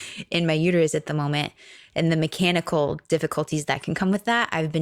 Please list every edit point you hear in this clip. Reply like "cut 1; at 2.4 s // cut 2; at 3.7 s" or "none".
none